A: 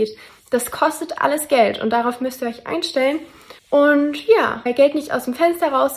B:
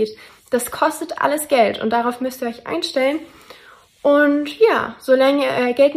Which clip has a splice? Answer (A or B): A